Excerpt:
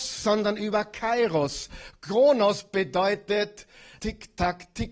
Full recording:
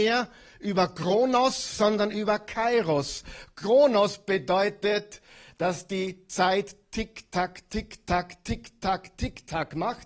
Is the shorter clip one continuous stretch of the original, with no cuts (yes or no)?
no